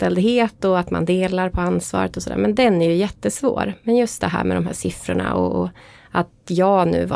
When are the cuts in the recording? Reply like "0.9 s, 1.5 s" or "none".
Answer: none

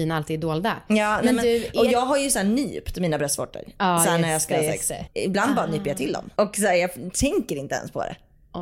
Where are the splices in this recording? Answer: 5.1 s, 6.4 s

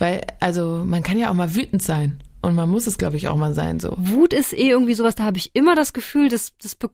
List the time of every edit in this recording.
none

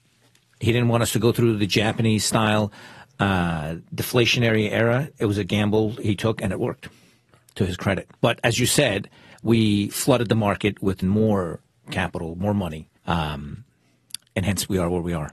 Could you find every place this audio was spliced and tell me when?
8.2 s, 11.0 s, 13.0 s

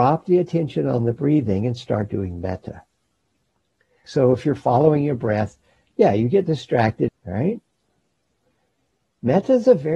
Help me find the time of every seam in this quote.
4.0 s, 7.1 s

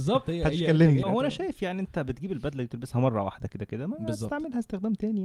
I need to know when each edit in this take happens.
1.0 s

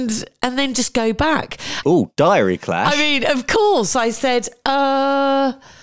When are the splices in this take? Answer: 1.8 s

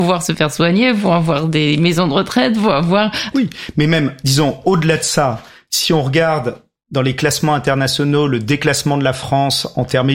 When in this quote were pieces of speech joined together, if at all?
3.3 s

